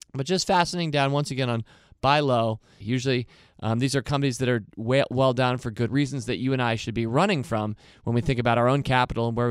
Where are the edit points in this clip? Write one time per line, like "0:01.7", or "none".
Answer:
0:02.8
0:05.9